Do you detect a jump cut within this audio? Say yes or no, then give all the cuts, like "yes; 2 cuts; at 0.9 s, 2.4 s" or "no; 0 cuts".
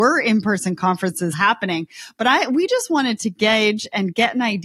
yes; 1 cut; at 1.3 s